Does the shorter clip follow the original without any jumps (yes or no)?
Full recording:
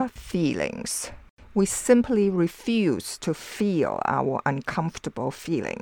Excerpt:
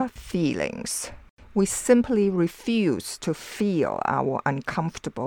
yes